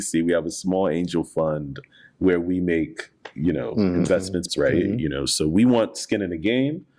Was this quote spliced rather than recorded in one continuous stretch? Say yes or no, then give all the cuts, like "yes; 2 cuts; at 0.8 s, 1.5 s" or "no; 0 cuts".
yes; 1 cut; at 4.5 s